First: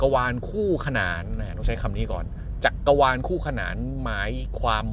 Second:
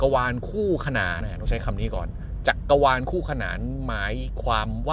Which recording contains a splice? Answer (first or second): second